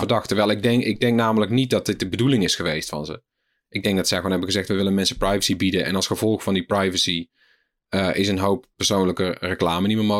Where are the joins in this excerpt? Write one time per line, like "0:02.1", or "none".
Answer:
none